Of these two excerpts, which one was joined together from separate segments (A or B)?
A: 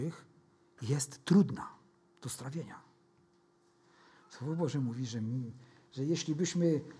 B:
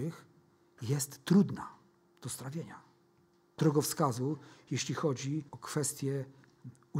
B